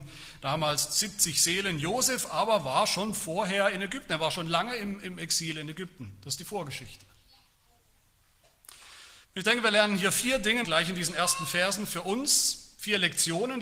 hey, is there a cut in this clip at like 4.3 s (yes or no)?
no